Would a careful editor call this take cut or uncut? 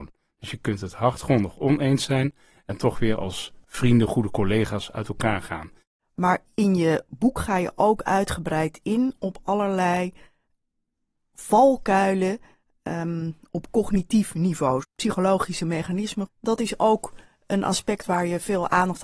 cut